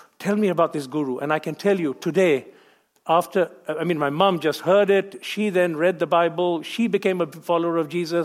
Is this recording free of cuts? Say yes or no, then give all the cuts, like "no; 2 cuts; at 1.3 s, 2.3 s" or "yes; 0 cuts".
yes; 0 cuts